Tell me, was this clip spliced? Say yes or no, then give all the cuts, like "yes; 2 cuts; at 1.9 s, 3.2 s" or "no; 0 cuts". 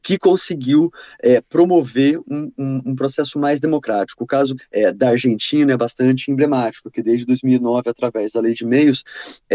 yes; 1 cut; at 4.6 s